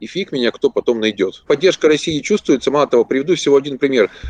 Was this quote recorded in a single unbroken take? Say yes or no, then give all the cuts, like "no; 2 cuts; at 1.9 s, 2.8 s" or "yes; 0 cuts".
no; 1 cut; at 1.5 s